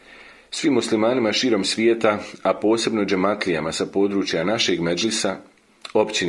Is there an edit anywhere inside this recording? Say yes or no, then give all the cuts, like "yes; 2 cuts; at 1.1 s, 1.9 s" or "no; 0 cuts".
no; 0 cuts